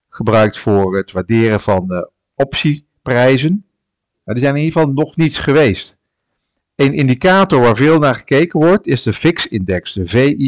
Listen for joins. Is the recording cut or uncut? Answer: cut